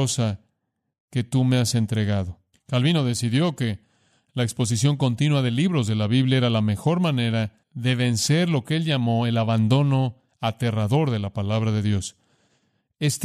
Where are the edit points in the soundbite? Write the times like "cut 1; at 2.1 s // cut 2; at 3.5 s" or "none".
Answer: cut 1; at 2.5 s // cut 2; at 7.6 s